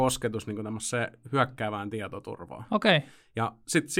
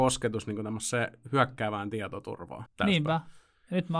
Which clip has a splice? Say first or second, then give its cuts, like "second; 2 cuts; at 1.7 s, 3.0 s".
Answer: second; 1 cut; at 2.7 s